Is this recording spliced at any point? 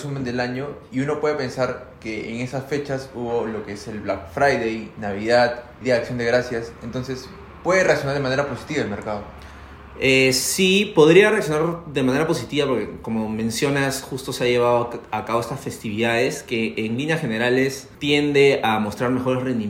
yes; 2 cuts; at 5.8 s, 17.9 s

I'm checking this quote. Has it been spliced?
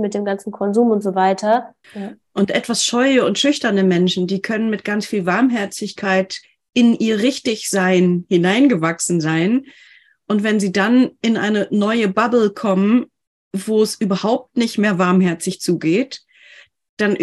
yes; 1 cut; at 1.8 s

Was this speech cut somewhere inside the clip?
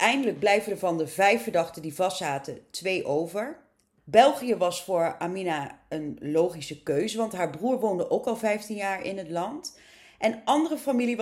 yes; 1 cut; at 4.0 s

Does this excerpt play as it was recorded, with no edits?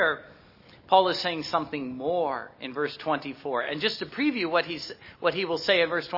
yes; 0 cuts

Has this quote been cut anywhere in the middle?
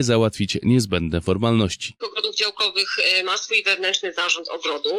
yes; 1 cut; at 2.0 s

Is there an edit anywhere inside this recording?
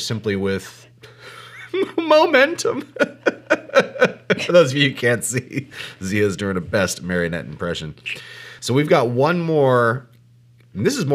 no; 0 cuts

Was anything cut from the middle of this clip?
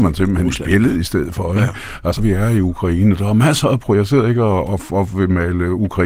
yes; 1 cut; at 2.2 s

